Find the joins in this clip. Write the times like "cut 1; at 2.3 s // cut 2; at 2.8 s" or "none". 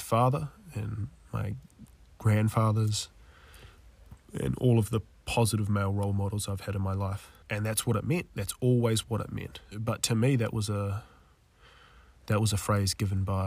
cut 1; at 9.7 s